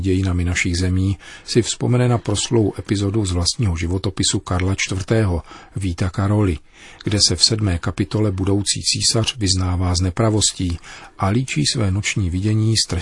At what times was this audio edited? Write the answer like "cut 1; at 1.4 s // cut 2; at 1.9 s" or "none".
none

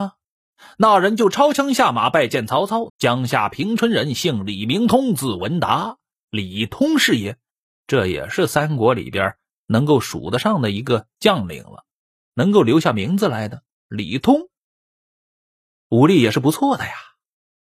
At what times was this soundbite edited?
cut 1; at 2.9 s

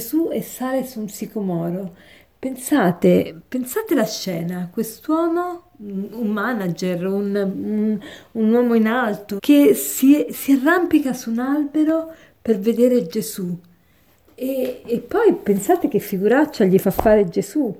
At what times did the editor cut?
cut 1; at 9.4 s

